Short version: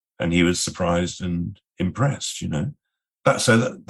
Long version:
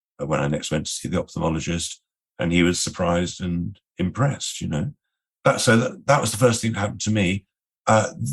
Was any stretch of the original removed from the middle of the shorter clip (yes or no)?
no